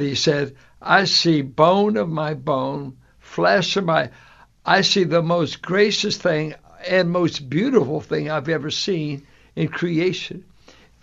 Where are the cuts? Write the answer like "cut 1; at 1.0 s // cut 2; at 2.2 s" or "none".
none

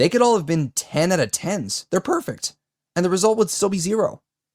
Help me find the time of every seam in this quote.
none

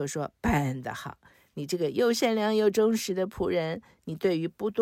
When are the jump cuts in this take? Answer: none

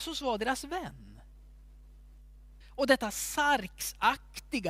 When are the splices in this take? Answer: cut 1; at 2.6 s

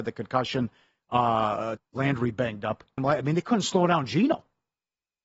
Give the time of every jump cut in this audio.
cut 1; at 1.8 s // cut 2; at 3.0 s

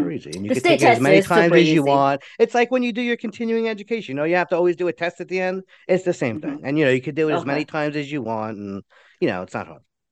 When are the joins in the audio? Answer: none

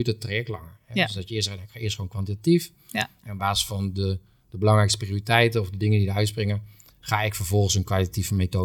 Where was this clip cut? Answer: none

